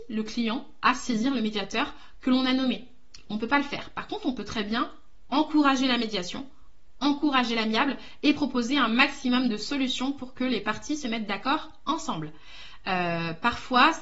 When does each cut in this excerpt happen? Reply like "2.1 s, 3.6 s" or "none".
none